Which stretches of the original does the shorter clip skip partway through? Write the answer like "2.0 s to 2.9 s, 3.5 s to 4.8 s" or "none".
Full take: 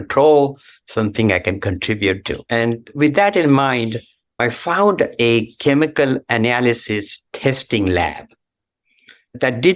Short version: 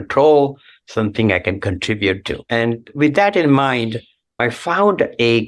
none